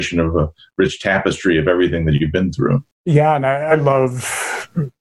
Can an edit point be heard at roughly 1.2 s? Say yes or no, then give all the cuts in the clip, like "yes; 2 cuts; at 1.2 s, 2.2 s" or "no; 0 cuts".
no; 1 cut; at 2.9 s